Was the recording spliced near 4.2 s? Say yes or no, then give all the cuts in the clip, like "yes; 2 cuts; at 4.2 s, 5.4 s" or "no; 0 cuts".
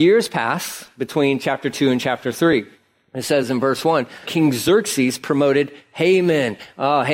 yes; 1 cut; at 4.2 s